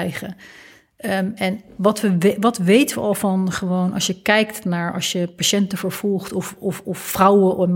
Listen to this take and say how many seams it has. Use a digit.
0